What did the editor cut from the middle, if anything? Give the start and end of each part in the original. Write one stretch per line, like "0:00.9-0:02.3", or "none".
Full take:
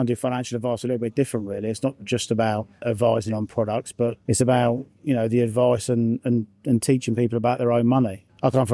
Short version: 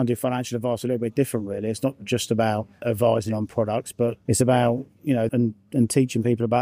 0:05.3-0:06.2